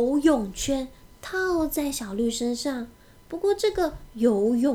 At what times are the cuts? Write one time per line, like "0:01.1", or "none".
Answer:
none